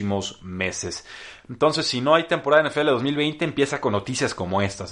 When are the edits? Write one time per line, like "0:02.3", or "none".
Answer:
none